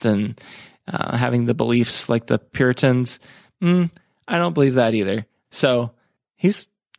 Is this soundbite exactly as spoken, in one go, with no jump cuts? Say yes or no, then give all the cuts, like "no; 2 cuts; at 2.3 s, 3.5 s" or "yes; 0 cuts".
no; 1 cut; at 5.4 s